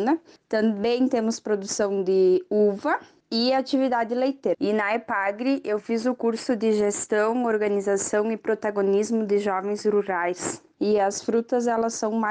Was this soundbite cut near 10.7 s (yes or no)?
yes